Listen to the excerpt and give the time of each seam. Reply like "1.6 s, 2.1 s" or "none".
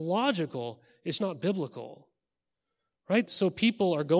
1.2 s, 3.3 s